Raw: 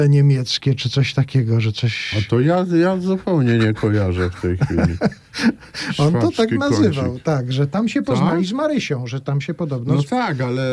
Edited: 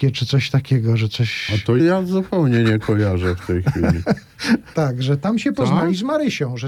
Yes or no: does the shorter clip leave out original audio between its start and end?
yes